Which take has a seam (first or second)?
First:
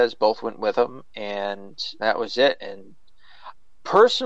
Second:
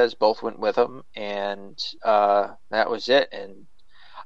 first